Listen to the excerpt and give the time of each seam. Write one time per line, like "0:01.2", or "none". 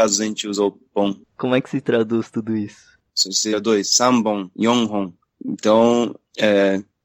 0:01.2
0:03.1